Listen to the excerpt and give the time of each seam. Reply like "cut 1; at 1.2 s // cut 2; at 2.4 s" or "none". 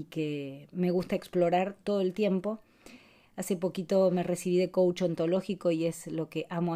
cut 1; at 3.2 s